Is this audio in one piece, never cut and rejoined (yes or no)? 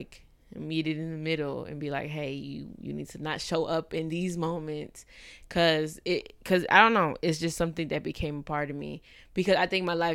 yes